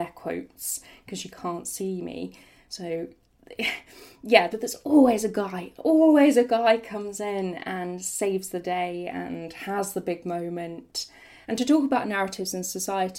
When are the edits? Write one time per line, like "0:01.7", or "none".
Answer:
0:04.5
0:11.4